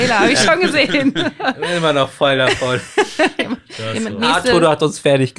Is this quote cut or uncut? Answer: uncut